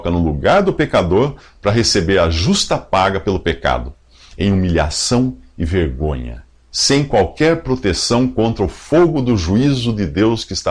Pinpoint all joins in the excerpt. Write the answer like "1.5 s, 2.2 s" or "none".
none